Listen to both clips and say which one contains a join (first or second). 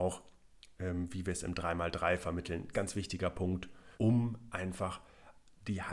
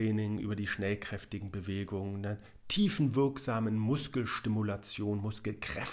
first